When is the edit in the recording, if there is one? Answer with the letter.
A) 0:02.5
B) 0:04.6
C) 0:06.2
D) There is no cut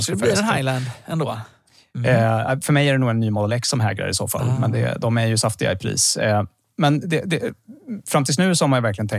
D